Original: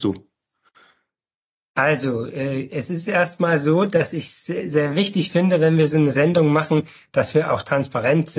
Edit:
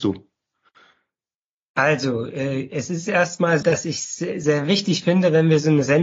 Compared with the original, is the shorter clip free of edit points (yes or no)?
no